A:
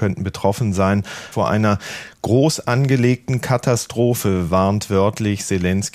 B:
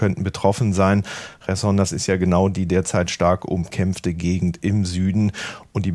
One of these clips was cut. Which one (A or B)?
A